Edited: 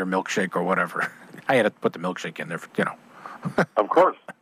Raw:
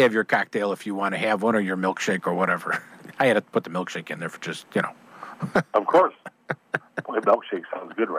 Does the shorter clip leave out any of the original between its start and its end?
yes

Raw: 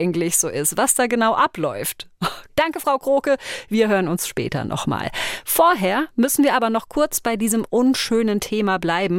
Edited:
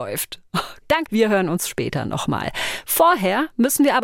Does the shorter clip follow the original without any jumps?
no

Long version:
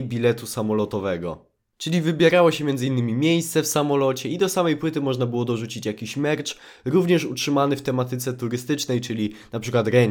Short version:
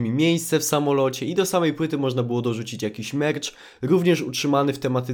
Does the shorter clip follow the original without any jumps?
yes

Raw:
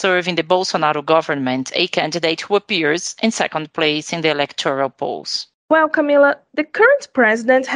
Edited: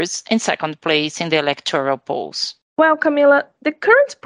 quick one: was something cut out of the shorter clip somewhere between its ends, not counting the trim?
no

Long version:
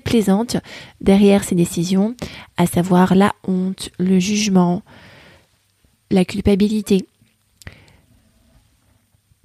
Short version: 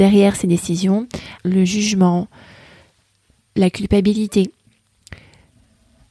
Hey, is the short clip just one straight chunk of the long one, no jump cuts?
no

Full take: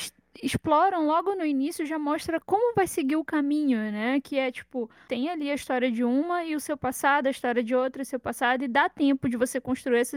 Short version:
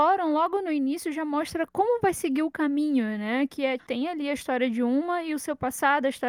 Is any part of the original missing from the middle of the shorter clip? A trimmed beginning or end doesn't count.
yes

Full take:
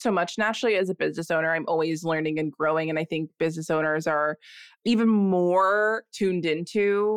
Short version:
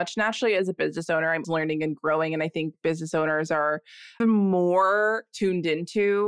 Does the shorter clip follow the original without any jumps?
no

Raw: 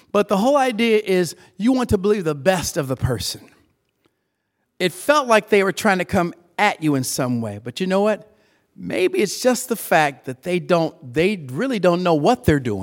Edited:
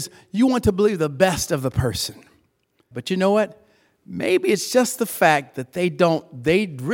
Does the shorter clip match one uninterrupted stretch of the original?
no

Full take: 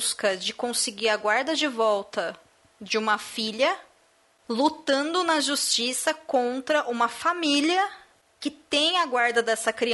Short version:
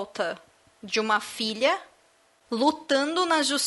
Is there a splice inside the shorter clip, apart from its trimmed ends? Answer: no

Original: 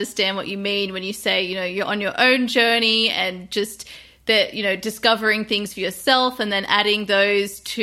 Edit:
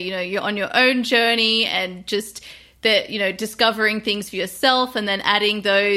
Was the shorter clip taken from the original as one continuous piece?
yes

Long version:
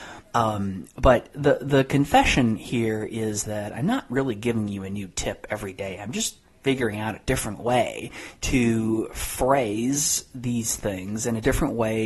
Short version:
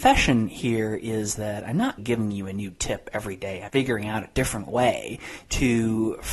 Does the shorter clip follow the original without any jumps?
no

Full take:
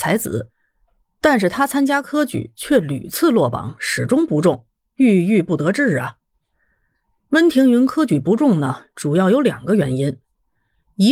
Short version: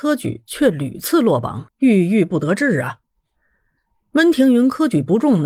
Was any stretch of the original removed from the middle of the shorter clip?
yes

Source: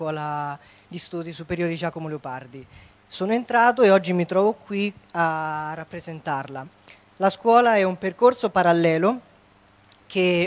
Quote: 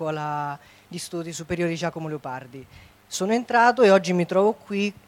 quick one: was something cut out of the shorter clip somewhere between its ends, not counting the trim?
no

